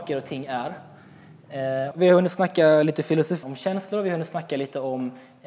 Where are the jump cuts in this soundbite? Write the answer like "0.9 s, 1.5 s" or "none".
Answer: 1.9 s, 3.4 s